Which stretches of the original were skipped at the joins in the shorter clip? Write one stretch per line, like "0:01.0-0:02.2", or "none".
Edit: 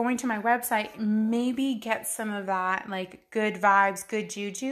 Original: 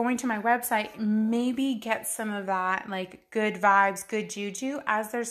none

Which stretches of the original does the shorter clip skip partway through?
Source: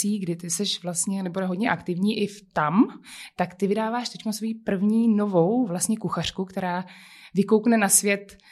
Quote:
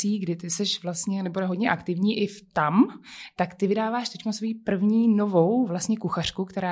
none

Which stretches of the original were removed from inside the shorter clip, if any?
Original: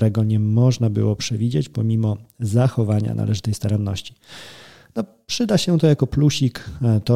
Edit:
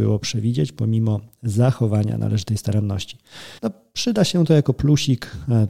0:04.5-0:04.9

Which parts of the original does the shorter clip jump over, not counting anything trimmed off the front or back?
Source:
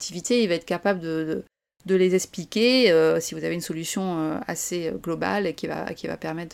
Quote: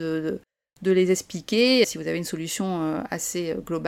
0:02.9-0:03.2

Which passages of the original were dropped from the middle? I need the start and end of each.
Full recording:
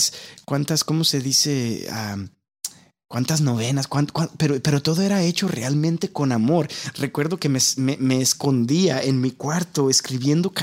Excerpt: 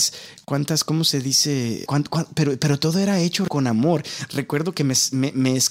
0:01.9-0:03.9
0:05.5-0:06.1

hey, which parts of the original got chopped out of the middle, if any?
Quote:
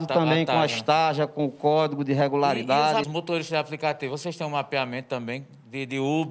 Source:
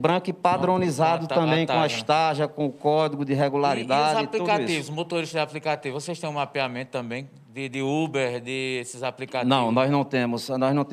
0:04.2-0:04.9

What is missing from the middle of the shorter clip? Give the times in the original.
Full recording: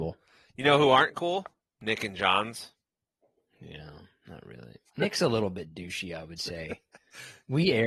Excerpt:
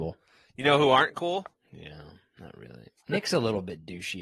0:01.5-0:03.4

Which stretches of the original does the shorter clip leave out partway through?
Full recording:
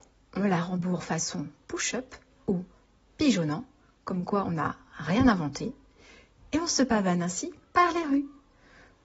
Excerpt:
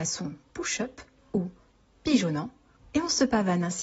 0:03.9-0:06.4

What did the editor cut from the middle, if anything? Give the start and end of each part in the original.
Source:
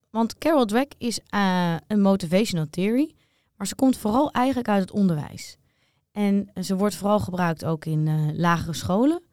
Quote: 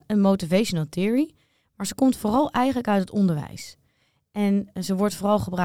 none

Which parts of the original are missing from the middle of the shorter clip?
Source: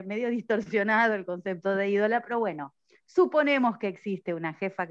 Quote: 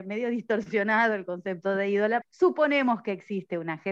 0:02.2-0:03.0

